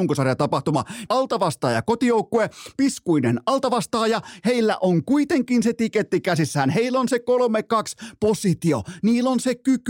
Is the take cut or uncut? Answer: cut